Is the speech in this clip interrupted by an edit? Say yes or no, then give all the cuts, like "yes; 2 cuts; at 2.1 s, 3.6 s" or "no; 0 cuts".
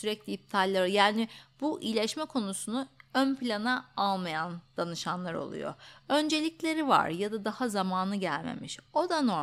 no; 0 cuts